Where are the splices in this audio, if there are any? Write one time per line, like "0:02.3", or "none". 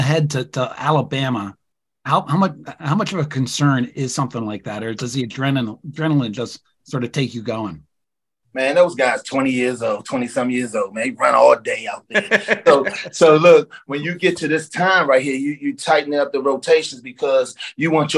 none